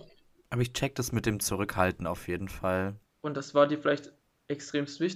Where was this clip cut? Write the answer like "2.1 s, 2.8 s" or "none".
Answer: 3.0 s

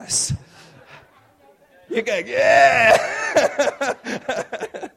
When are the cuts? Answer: 1.9 s

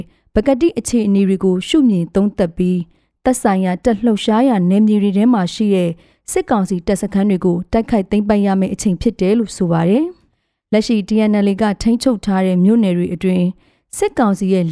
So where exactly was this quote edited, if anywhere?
none

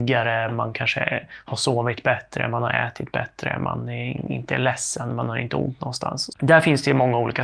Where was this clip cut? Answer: 6.3 s

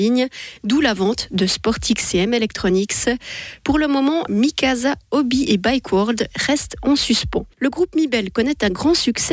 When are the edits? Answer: 4.3 s, 7.5 s

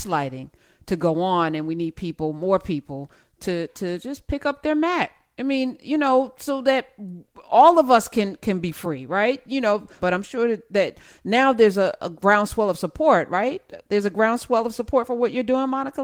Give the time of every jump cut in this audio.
10.0 s

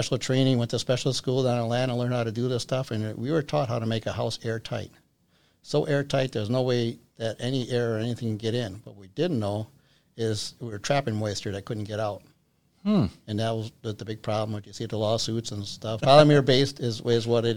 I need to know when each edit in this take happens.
16.0 s

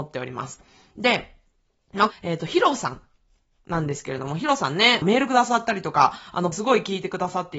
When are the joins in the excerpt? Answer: 2.1 s, 5.0 s, 6.5 s

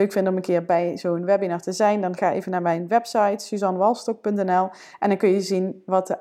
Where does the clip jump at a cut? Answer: none

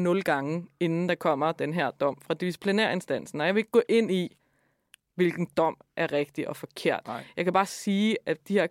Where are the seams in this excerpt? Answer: none

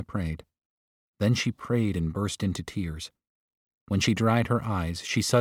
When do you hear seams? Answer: none

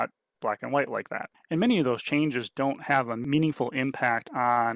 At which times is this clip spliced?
1.3 s

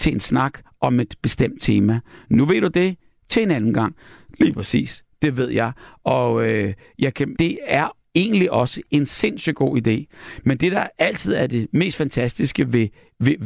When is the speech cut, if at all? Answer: 7.3 s

